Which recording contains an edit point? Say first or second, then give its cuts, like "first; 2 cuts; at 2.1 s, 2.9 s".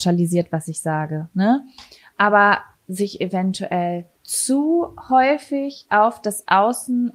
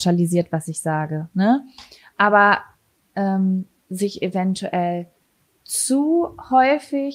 first; 2 cuts; at 2.8 s, 4.1 s